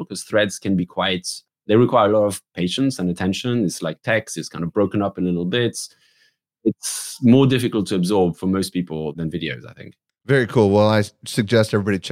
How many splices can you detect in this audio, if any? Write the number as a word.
zero